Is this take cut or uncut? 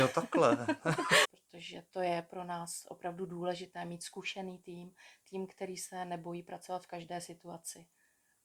cut